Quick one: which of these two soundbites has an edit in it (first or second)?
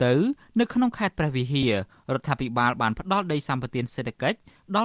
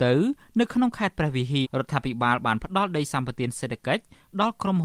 second